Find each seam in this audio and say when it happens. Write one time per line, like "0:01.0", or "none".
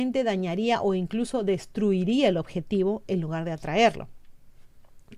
none